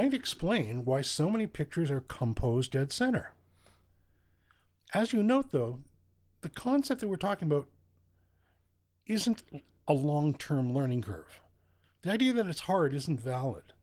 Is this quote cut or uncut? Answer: uncut